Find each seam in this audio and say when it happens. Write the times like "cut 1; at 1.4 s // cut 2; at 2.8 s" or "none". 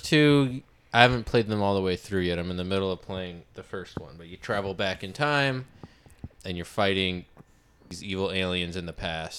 none